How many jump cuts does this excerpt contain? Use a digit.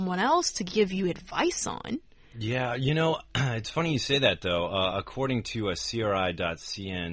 0